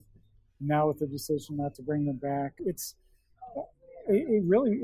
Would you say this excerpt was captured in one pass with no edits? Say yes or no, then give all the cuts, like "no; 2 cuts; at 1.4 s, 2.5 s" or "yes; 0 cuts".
no; 1 cut; at 2.6 s